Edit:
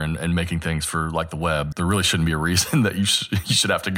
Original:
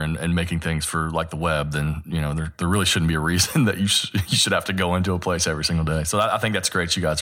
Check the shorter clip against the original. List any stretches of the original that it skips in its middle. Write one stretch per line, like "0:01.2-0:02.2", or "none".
0:01.7-0:02.5